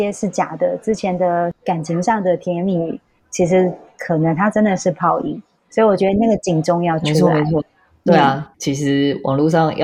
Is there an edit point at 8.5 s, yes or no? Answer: yes